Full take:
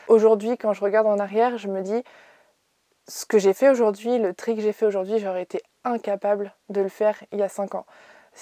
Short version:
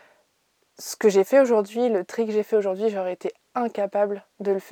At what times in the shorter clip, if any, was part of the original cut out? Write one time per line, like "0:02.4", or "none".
none